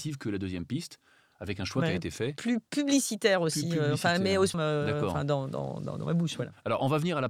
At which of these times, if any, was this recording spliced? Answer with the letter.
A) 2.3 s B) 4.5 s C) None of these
B